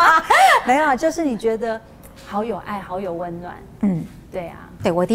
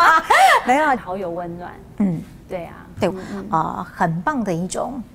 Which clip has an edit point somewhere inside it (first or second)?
second